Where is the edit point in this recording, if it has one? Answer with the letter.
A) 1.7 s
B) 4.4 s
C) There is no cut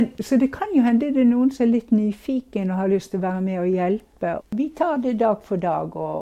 B